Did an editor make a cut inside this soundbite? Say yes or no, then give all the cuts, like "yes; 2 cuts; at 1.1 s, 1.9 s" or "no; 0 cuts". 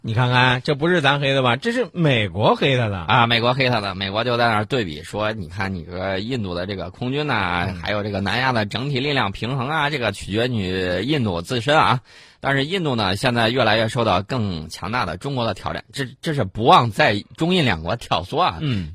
no; 0 cuts